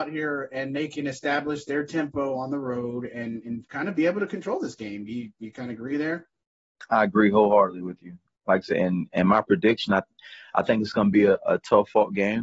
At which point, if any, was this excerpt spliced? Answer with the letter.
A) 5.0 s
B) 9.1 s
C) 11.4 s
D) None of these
D